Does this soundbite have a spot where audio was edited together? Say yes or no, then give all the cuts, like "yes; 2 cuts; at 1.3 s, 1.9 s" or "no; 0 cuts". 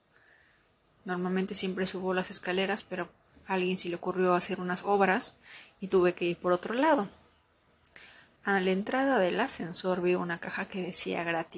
yes; 1 cut; at 8.4 s